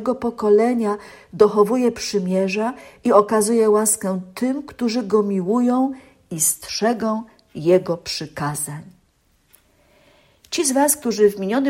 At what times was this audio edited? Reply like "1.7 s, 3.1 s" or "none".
none